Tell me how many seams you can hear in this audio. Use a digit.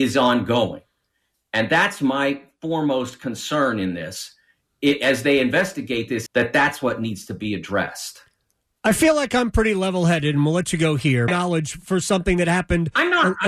2